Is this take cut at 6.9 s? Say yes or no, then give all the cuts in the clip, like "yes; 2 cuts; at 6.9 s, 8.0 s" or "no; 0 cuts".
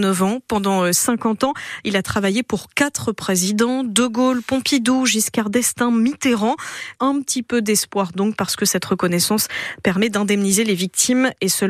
yes; 1 cut; at 6.9 s